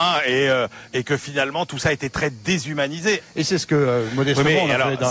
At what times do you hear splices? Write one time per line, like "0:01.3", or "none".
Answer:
0:03.2